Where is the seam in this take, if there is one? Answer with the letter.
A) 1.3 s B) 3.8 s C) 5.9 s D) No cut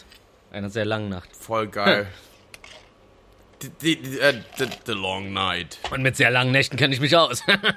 D